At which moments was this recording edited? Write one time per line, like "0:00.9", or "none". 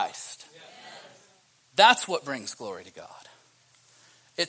none

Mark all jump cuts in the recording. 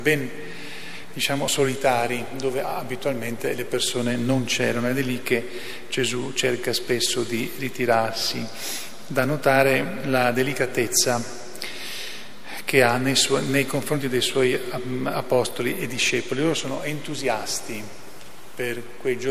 none

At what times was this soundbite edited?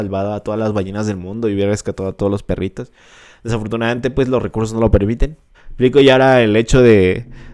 0:05.5

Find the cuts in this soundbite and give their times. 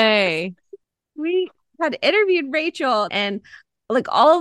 0:03.1

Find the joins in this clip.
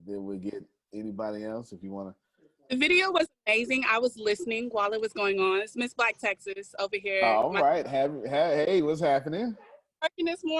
none

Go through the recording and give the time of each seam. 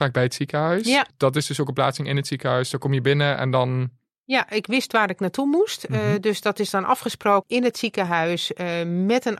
none

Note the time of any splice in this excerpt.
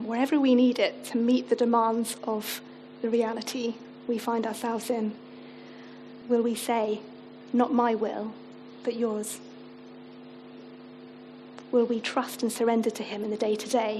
0:06.2

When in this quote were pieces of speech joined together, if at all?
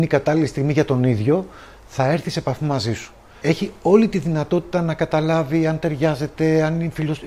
0:03.4

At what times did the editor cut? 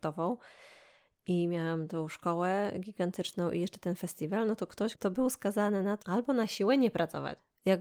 0:04.9
0:06.0

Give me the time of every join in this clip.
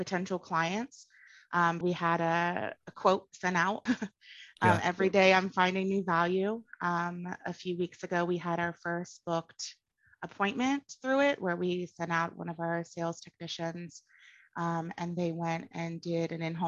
0:01.8
0:03.9

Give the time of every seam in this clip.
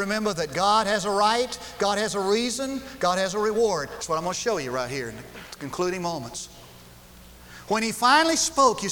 none

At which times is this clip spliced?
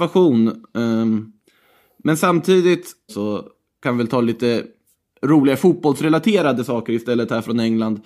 0:03.1

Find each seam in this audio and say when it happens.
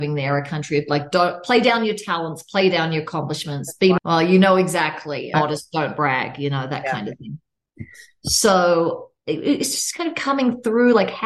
0:04.0
0:05.3

